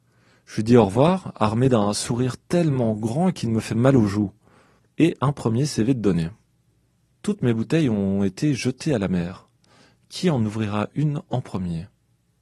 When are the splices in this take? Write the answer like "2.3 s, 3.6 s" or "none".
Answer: 7.1 s